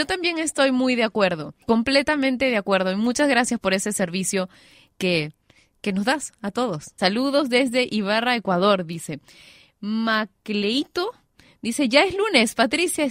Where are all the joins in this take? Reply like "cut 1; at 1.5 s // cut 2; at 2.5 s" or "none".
cut 1; at 1.6 s // cut 2; at 7.0 s